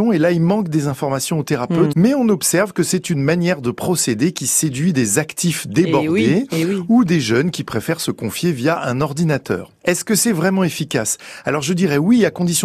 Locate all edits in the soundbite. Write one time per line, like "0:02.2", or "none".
0:01.9